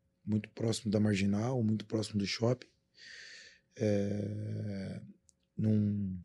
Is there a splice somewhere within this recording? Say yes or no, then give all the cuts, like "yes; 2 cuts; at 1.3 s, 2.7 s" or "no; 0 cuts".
no; 0 cuts